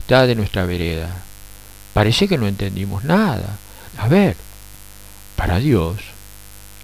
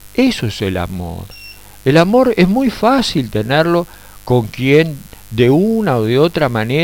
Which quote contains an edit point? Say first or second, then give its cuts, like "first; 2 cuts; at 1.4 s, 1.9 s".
first; 2 cuts; at 1.7 s, 3.9 s